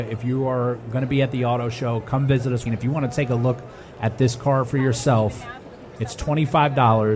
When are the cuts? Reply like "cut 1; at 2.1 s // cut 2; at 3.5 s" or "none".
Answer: cut 1; at 2.7 s

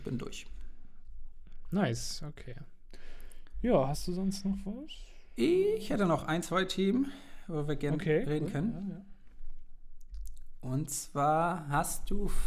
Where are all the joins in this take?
none

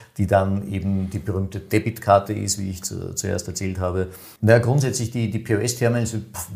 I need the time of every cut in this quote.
cut 1; at 4.4 s

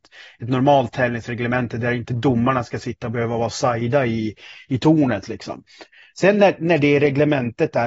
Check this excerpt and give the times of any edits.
none

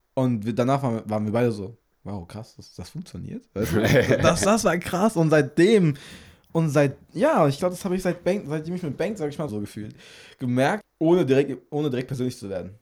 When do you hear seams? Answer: cut 1; at 9.5 s // cut 2; at 10.8 s

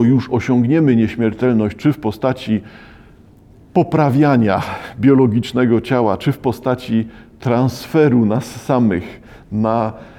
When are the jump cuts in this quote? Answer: none

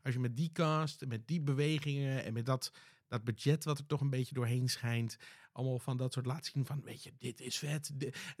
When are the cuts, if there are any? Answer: none

